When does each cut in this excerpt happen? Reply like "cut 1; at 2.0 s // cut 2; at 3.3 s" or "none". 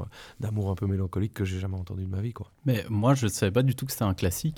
cut 1; at 2.6 s

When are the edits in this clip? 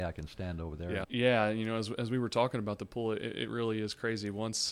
cut 1; at 1.0 s

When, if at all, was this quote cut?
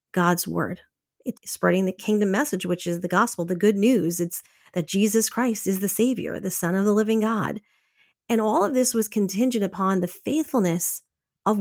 cut 1; at 1.4 s

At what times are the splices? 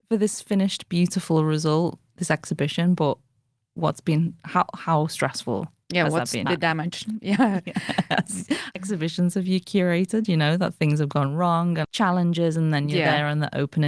cut 1; at 6.5 s // cut 2; at 8.8 s // cut 3; at 11.8 s

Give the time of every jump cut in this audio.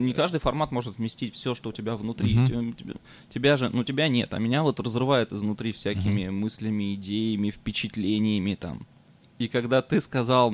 none

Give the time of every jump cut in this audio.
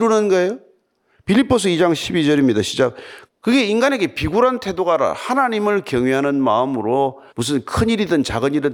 cut 1; at 3.3 s // cut 2; at 7.3 s

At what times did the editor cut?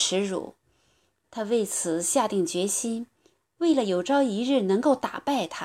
cut 1; at 1.2 s

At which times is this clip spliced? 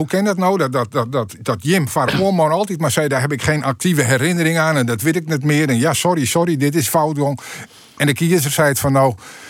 none

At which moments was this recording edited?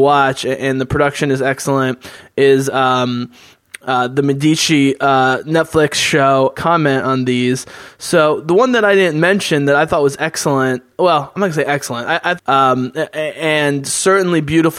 cut 1; at 6.5 s // cut 2; at 12.4 s

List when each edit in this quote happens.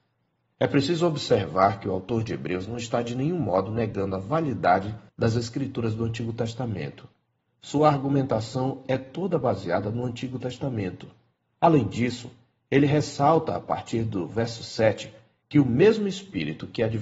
cut 1; at 5.1 s // cut 2; at 7.5 s

